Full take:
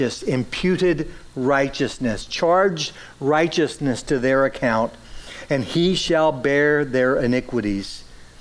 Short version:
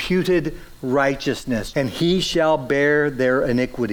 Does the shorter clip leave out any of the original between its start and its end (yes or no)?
yes